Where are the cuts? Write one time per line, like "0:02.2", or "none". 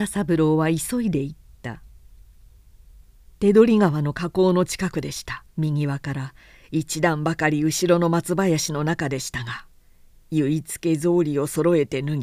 0:05.5